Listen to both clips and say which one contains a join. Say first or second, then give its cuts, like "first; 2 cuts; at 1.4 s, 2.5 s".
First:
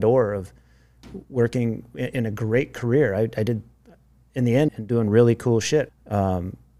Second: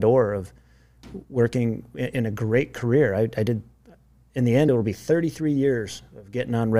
first; 2 cuts; at 4.7 s, 5.9 s